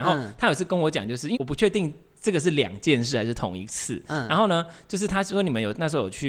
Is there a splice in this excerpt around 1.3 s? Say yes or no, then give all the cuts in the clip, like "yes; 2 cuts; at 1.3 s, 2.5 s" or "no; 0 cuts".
yes; 1 cut; at 1.3 s